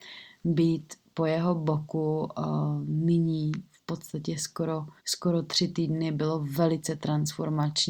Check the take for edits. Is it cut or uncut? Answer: cut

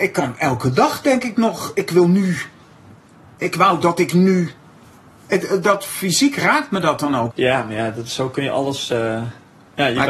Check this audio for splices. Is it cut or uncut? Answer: cut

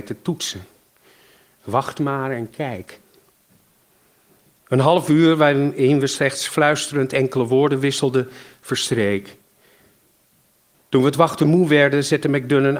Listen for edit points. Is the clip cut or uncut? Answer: uncut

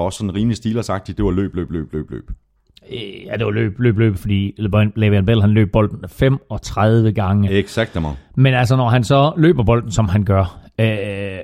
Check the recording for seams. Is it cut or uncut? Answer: uncut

